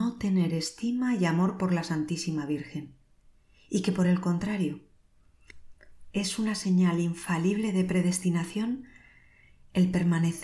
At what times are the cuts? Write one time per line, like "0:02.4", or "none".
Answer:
none